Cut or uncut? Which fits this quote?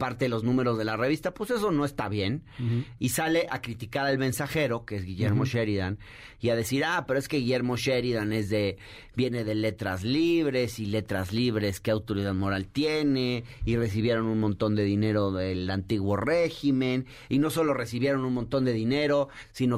cut